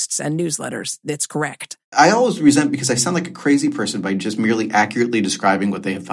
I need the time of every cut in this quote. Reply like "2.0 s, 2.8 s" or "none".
1.9 s